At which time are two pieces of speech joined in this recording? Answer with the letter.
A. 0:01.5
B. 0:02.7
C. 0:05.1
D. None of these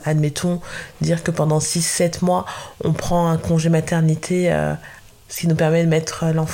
C